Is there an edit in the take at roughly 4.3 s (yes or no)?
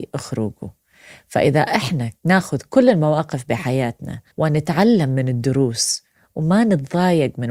yes